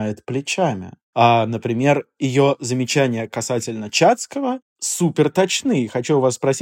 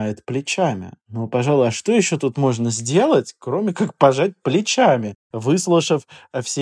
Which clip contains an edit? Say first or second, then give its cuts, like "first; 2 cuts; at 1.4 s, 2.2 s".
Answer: first; 1 cut; at 1.0 s